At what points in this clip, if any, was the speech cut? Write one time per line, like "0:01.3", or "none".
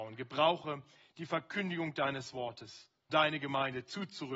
0:03.1

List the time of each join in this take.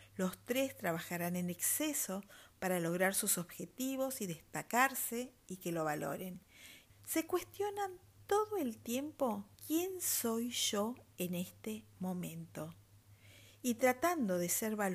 0:06.9
0:09.5

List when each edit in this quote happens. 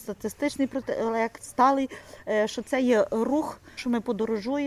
0:03.8

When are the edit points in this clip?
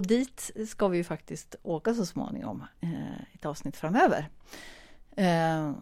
none

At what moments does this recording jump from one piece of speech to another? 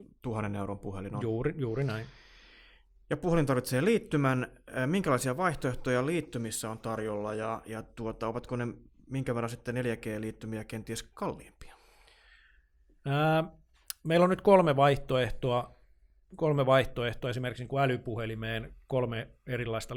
none

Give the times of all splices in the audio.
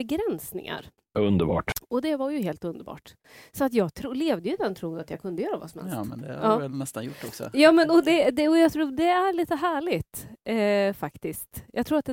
none

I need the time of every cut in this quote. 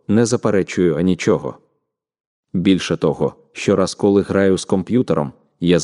none

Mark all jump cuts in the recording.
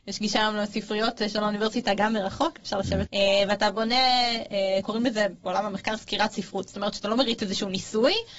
0:03.1

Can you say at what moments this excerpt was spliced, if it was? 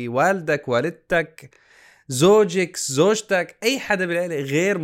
none

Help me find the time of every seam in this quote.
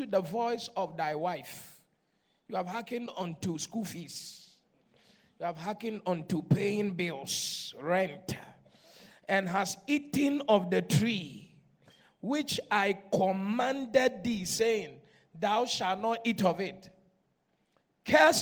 none

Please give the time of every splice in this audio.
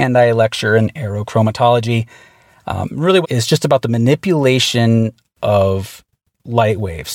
0:03.2

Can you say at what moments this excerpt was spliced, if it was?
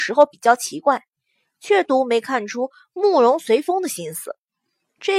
0:01.8

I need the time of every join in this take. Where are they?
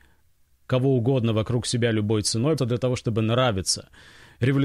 0:02.6

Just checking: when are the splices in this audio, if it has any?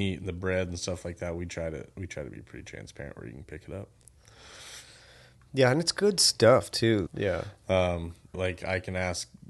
0:07.1
0:08.3

